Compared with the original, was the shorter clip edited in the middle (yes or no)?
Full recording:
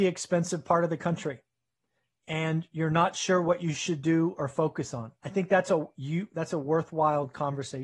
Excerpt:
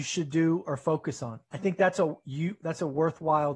no